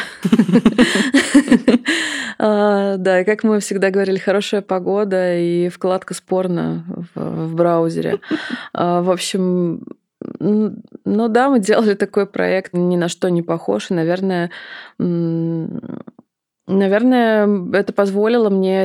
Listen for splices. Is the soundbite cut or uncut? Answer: cut